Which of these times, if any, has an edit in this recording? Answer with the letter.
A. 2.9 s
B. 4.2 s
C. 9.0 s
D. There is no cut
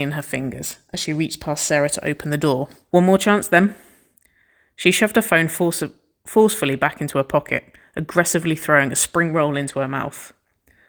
A